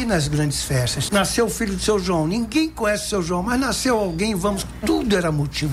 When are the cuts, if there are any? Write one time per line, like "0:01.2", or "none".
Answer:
0:01.1